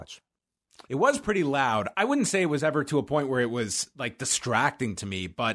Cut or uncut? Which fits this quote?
uncut